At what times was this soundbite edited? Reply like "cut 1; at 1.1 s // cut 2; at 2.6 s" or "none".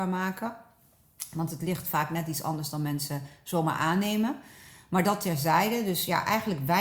none